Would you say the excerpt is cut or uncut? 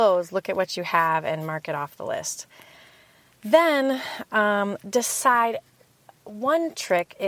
uncut